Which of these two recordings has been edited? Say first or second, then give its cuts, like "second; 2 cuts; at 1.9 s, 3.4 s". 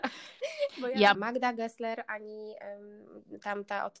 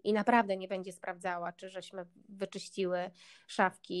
first; 1 cut; at 1.1 s